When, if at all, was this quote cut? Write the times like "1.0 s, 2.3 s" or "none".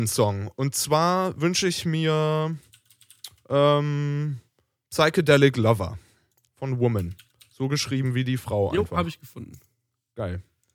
none